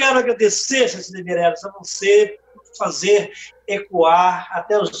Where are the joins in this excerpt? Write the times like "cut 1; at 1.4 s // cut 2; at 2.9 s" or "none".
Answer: none